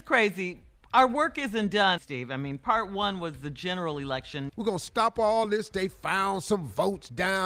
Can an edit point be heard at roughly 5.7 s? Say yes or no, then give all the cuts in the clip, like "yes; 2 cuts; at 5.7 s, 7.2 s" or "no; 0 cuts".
no; 2 cuts; at 2.0 s, 4.5 s